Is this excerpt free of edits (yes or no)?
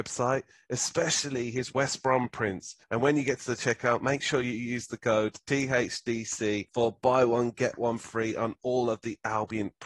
yes